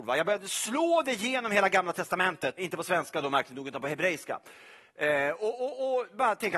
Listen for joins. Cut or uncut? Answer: cut